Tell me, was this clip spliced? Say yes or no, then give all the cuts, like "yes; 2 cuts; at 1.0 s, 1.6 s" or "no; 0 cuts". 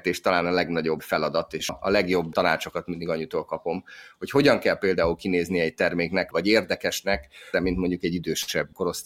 yes; 3 cuts; at 1.7 s, 6.3 s, 7.5 s